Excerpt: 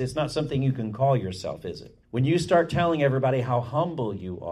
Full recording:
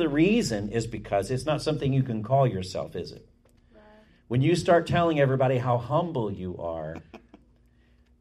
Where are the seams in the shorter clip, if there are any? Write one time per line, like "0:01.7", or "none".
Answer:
0:02.0